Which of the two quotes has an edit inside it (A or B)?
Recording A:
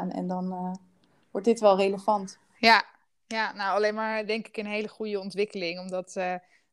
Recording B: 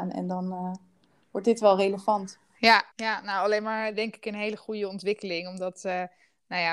B